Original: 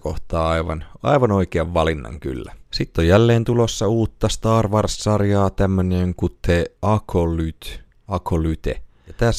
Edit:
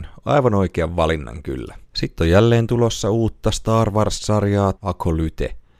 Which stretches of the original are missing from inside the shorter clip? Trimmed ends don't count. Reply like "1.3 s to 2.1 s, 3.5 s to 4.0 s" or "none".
5.5 s to 8.0 s